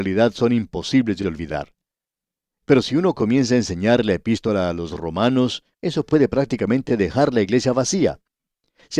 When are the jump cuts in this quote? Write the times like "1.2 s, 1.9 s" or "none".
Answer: 2.6 s, 5.7 s